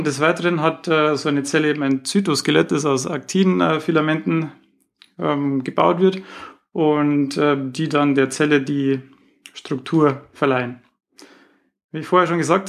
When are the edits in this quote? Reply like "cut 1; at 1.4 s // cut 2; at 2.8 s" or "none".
none